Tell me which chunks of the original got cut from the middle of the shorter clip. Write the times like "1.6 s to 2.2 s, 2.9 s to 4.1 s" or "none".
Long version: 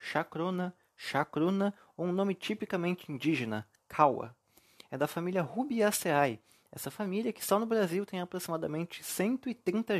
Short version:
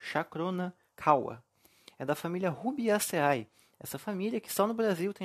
0.9 s to 3.8 s